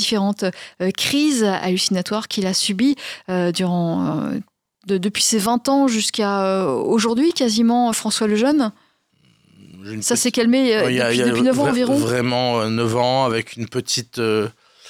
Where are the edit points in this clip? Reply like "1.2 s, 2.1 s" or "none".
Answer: none